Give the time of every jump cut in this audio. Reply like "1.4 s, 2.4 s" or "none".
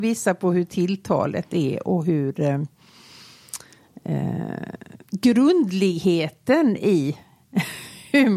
5.0 s